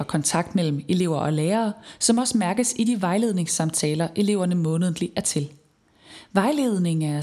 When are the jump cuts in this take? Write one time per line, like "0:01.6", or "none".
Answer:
none